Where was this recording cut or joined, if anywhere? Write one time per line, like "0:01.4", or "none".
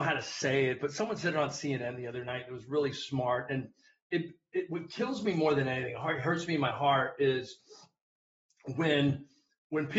none